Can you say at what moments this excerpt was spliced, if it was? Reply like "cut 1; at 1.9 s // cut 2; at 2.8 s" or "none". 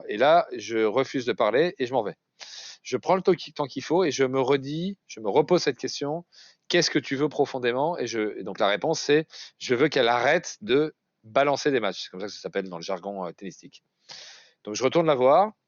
none